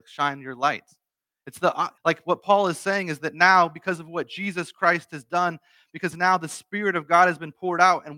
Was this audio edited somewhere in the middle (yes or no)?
yes